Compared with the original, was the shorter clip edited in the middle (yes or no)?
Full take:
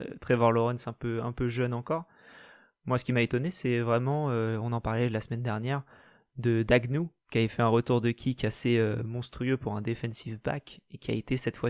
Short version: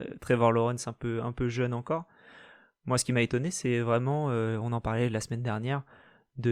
no